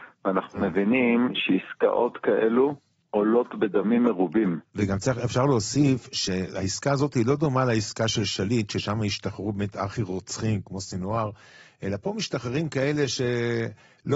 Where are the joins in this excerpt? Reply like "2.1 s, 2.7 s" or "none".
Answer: 4.7 s